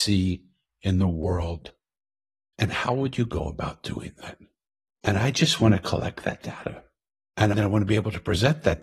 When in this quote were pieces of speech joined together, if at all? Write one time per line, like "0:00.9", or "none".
0:02.5